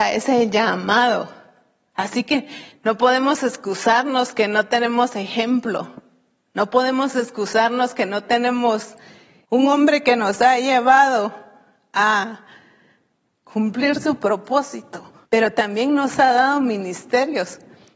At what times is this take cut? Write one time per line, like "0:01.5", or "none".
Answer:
0:09.4
0:15.2